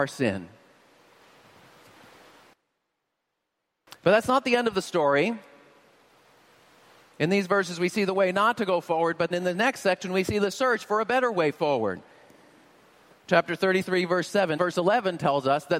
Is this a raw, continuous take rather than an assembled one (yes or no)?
no